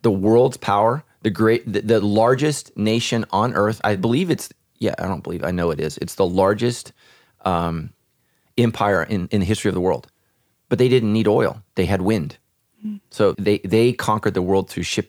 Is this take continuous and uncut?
no; 1 cut; at 13.3 s

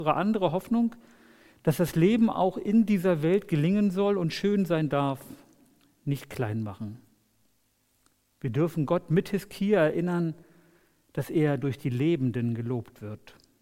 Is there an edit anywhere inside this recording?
no; 0 cuts

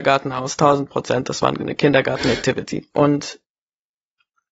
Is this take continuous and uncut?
no; 1 cut; at 2.9 s

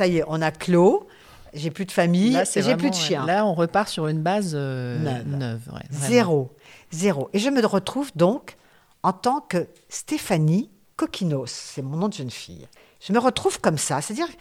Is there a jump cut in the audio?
no; 0 cuts

